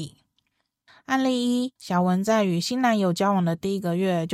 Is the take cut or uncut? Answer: cut